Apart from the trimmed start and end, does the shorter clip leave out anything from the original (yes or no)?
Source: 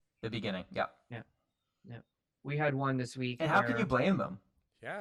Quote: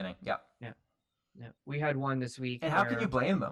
yes